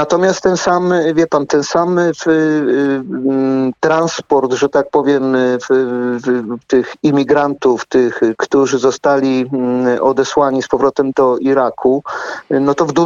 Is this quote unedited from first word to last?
no; 2 cuts; at 8.3 s, 11.1 s

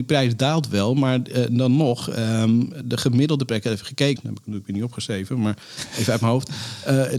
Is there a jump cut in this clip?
yes; 1 cut; at 4.2 s

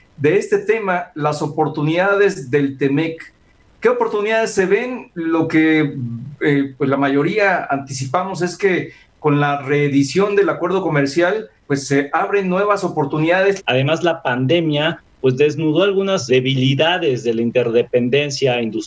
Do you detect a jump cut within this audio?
yes; 3 cuts; at 11.7 s, 13.6 s, 16.3 s

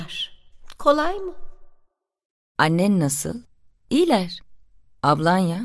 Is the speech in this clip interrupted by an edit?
no; 0 cuts

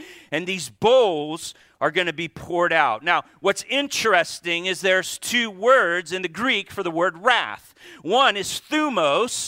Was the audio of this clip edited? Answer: no; 0 cuts

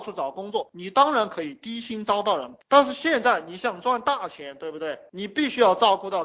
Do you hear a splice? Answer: no; 0 cuts

